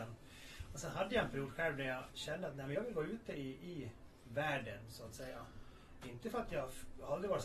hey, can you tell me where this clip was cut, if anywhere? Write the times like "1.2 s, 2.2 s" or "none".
none